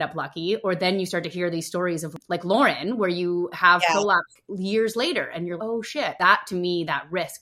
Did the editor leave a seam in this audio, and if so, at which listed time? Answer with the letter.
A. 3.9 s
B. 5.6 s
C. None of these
B